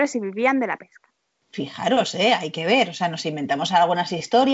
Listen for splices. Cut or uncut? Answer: uncut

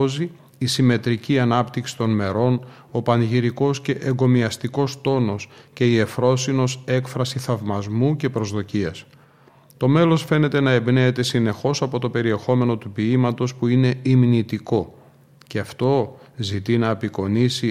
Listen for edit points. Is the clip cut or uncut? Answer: uncut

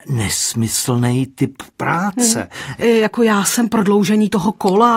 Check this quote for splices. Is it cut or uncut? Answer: cut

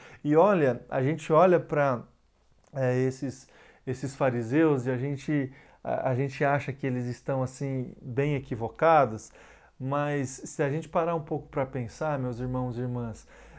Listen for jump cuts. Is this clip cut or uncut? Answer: uncut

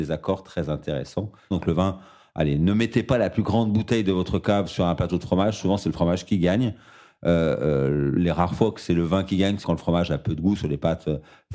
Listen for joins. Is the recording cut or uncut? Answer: cut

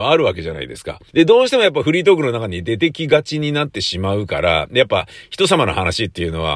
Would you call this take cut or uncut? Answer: cut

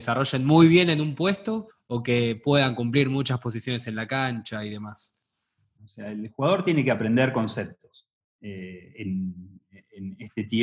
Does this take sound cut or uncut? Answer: cut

